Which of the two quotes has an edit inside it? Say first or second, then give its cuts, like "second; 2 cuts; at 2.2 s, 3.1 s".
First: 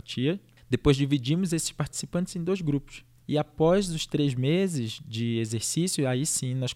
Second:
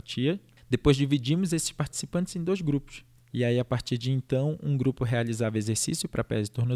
first; 1 cut; at 3.2 s